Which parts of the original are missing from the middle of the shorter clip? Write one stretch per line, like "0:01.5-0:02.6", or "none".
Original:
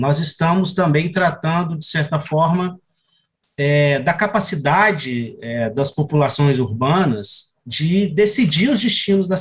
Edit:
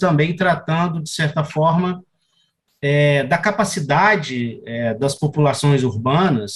none

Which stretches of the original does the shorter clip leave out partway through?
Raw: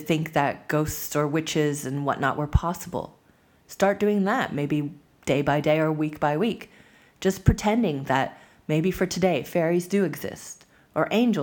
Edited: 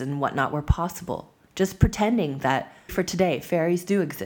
0:03.3-0:07.1
0:08.5-0:08.9

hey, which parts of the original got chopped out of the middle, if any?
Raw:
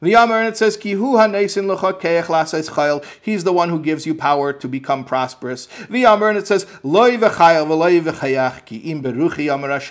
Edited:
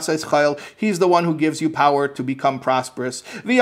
none

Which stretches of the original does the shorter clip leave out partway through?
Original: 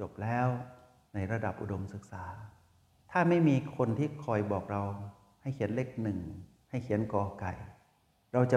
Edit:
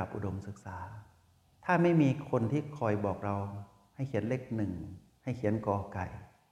none

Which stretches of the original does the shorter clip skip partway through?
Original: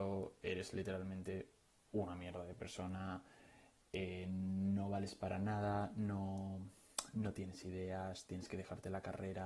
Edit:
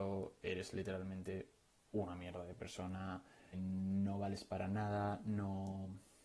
0:03.5-0:04.2

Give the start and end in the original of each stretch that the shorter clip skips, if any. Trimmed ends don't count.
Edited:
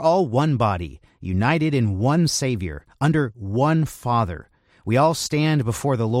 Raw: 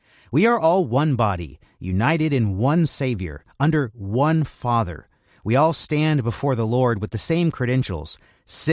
none

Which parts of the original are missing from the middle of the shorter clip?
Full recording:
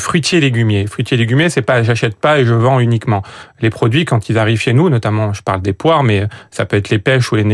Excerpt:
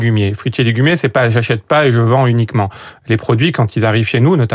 none

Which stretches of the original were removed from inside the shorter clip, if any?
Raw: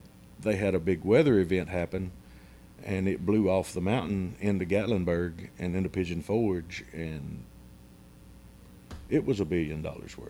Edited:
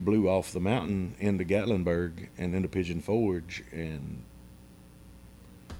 none

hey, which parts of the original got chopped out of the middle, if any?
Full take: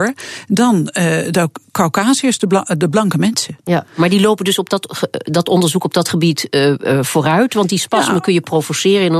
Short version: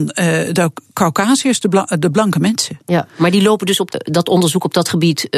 0:04.7-0:05.1

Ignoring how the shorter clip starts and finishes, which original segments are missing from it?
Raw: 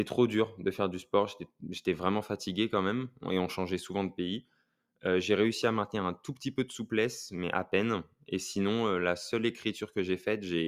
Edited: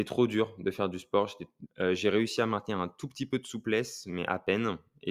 0:01.6-0:04.9

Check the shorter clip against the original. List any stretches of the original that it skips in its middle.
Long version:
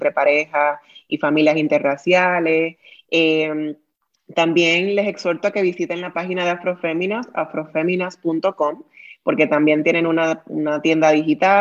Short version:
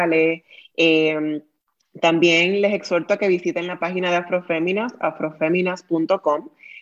none

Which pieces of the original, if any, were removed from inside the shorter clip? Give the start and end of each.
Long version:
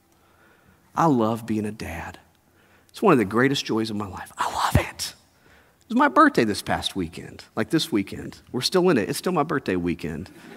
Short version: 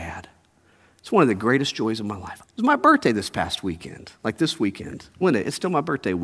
0:04.3-0:05.7
0:08.5-0:08.8

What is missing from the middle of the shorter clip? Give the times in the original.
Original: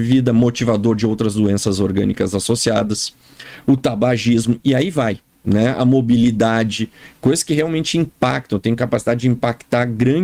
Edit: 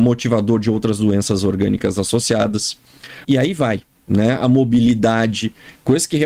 0:03.6-0:04.6

